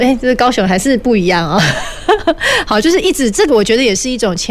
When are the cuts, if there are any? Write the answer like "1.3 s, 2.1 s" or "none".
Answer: none

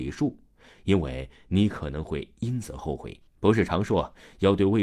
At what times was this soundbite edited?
3.3 s

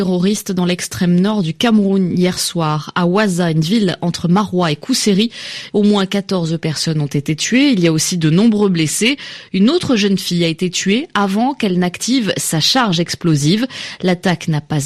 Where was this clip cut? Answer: 5.7 s

